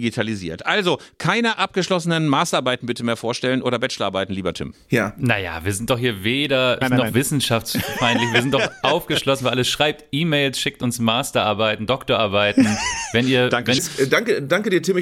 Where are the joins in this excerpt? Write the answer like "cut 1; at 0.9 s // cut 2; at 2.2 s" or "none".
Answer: cut 1; at 6.8 s // cut 2; at 13.8 s